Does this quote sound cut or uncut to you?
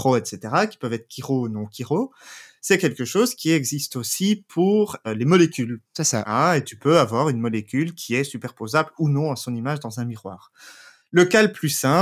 cut